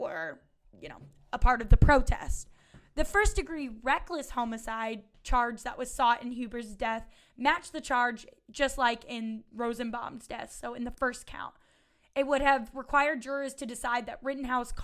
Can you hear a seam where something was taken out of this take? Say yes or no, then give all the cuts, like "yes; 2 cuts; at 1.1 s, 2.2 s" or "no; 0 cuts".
no; 0 cuts